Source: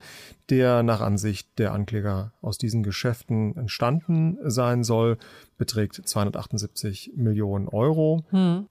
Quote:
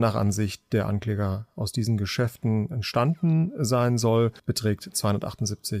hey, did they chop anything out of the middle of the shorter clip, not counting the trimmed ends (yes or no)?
yes